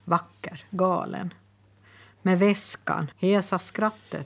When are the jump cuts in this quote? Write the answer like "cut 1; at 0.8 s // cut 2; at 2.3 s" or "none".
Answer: cut 1; at 3.1 s